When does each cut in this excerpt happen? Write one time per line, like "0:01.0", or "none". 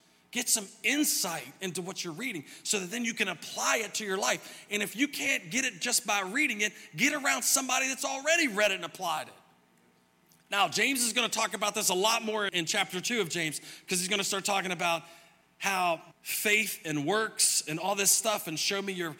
0:10.3
0:12.5
0:16.1